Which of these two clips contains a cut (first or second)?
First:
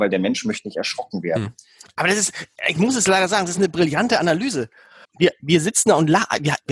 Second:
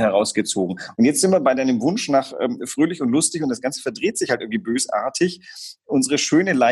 first